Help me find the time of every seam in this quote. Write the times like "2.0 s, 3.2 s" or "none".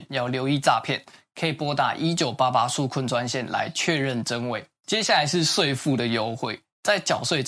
none